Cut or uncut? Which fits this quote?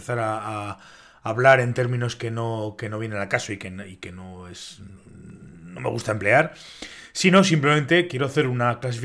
uncut